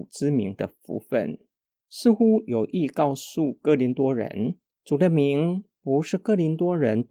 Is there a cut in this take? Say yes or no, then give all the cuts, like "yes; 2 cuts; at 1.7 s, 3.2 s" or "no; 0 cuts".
yes; 1 cut; at 1.9 s